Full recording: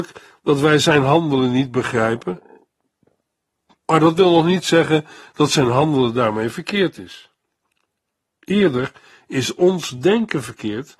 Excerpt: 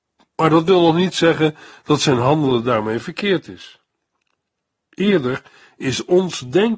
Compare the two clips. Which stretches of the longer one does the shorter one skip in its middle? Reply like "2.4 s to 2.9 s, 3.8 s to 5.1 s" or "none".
none